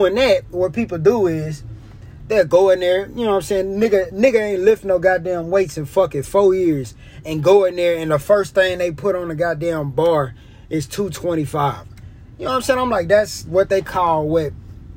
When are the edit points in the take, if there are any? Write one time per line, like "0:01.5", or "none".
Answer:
none